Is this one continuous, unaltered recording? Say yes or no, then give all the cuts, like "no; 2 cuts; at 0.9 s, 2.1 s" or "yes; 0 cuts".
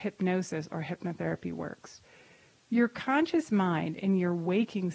yes; 0 cuts